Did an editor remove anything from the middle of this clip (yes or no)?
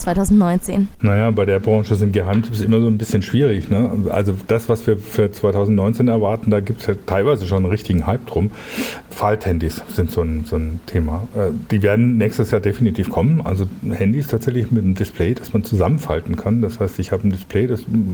no